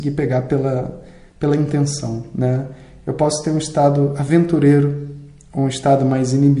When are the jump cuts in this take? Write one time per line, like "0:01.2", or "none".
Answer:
none